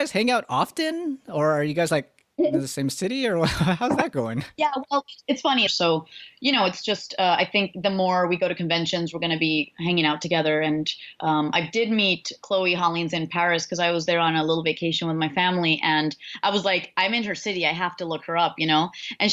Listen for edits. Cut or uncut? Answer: cut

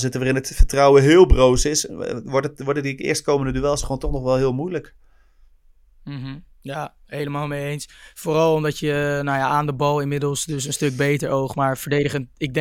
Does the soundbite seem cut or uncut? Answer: uncut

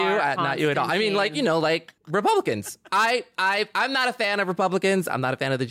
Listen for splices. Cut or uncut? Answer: cut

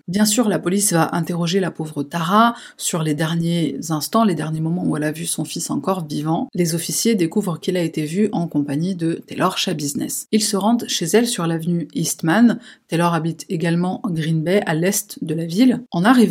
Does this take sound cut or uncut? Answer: uncut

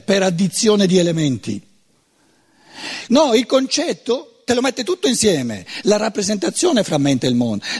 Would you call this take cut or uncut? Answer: cut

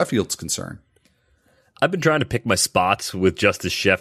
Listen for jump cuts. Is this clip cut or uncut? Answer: uncut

